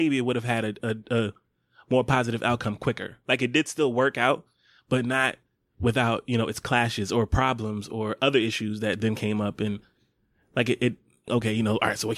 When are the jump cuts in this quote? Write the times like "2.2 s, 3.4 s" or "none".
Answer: 11.3 s